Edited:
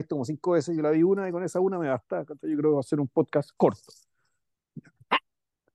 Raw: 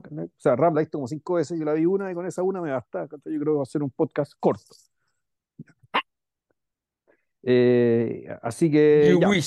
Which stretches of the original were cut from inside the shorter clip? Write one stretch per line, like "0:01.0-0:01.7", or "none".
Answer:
none